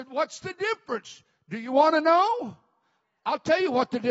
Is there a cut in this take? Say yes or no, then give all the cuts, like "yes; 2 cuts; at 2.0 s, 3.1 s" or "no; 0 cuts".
no; 0 cuts